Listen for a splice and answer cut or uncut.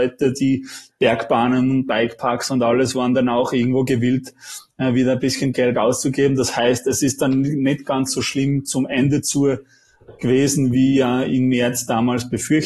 uncut